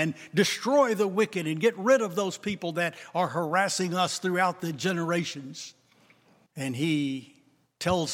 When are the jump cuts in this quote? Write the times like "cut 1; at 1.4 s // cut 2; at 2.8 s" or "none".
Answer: cut 1; at 6.5 s